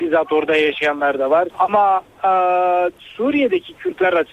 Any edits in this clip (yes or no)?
yes